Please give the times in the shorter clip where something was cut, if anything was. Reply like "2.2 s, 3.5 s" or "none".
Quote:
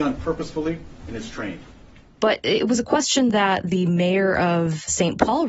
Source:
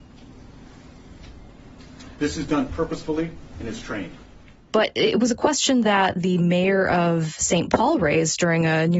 none